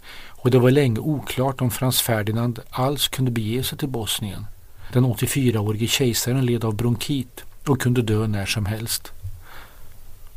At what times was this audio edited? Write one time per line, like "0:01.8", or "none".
0:04.9